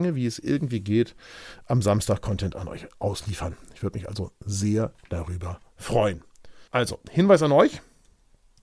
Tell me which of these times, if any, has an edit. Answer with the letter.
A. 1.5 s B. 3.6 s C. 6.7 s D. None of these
C